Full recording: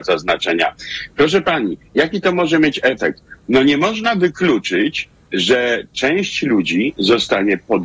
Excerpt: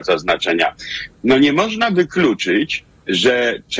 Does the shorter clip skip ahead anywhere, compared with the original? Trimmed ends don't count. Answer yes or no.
yes